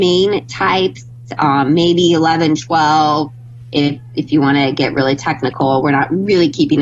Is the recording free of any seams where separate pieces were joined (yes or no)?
yes